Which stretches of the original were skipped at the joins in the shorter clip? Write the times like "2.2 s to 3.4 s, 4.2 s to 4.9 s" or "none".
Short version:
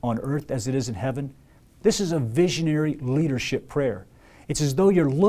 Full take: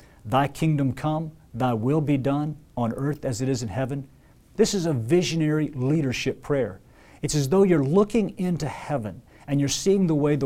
none